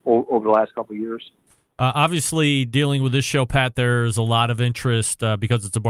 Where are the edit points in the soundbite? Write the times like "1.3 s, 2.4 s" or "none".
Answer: none